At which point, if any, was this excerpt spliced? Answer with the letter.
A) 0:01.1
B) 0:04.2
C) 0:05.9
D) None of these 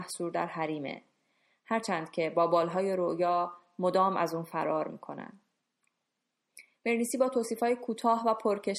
D